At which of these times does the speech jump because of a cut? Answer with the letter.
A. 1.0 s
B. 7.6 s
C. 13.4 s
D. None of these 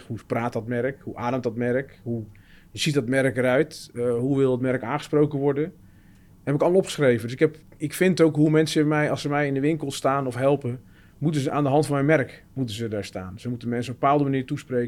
B